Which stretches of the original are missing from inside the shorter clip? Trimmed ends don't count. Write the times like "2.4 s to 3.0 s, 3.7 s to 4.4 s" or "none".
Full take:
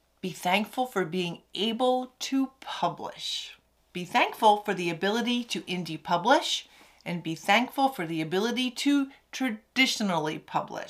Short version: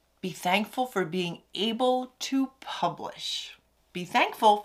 none